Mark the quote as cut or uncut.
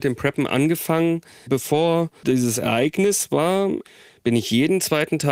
cut